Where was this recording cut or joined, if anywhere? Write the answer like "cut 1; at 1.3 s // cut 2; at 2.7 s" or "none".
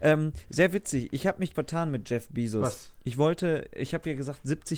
cut 1; at 1.5 s